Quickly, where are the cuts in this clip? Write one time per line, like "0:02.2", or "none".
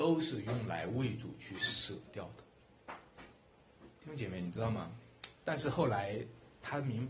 0:04.0
0:05.4